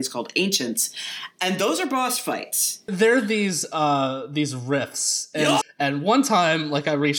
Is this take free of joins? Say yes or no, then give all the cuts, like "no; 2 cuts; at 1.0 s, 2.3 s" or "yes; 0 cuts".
no; 2 cuts; at 2.9 s, 5.6 s